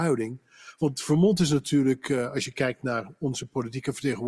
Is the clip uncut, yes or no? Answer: yes